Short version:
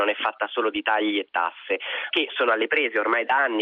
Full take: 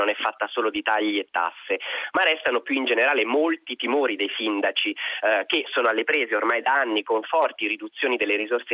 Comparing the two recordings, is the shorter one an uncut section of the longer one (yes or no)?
no